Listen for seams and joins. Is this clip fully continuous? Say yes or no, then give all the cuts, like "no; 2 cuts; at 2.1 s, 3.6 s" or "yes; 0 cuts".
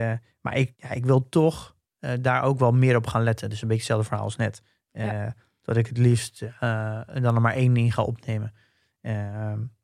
yes; 0 cuts